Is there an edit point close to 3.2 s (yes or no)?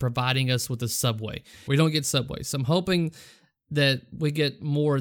no